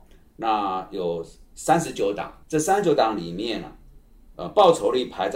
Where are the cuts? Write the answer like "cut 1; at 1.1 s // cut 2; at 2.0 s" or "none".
cut 1; at 2.4 s